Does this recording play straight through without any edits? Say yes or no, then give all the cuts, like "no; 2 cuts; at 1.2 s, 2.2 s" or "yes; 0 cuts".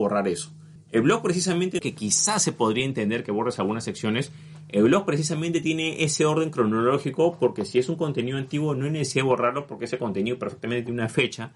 no; 1 cut; at 1.8 s